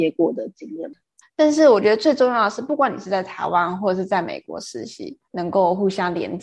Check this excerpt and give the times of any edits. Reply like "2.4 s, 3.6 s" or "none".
1.2 s, 5.3 s

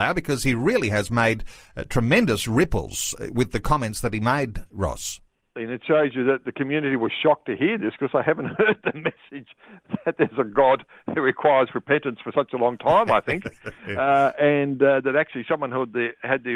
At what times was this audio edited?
5.6 s

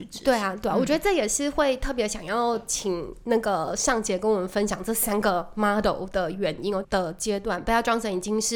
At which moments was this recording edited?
6.8 s

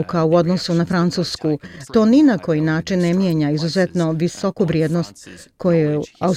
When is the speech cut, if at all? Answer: 1.9 s

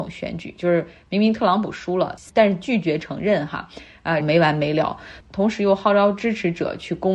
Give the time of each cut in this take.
4.2 s

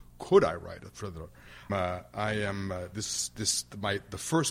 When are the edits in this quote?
1.7 s

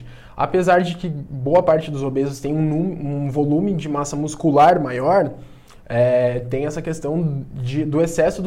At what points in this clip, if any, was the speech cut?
none

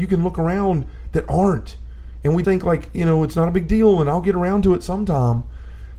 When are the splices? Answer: 2.4 s

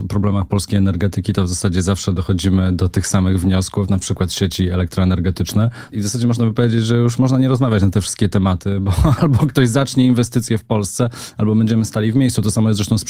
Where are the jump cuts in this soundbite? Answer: 5.9 s

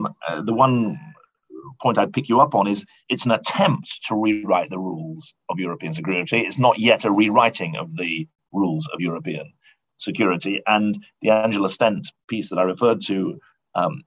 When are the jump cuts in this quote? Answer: none

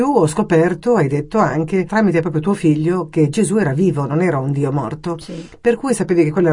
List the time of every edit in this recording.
1.9 s

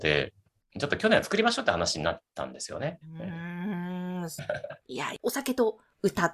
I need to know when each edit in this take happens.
3.0 s

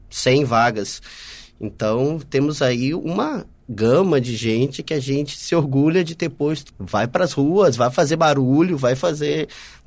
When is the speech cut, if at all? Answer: 6.7 s

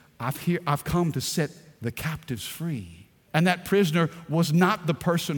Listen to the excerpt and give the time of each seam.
3.3 s

